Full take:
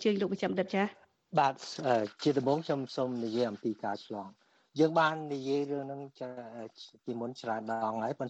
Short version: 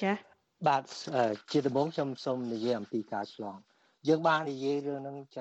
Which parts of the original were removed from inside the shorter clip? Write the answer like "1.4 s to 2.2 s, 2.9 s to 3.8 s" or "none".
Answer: 5.2 s to 5.3 s